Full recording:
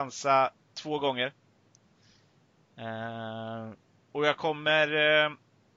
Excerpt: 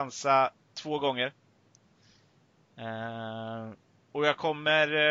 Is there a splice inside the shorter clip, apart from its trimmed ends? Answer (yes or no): no